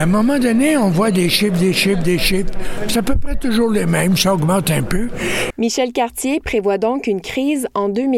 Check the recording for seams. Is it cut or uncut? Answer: cut